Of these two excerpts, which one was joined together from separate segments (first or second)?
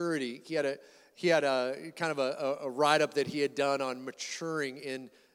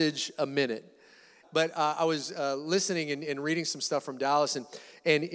second